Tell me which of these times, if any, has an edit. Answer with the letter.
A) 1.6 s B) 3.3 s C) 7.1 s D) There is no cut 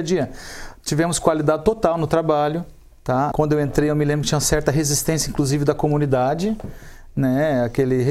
B